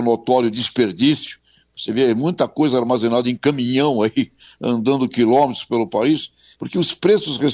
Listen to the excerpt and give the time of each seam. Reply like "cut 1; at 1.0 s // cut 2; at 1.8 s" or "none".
cut 1; at 6.5 s